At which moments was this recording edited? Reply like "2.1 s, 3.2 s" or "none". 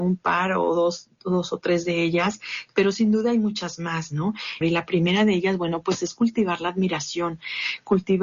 4.6 s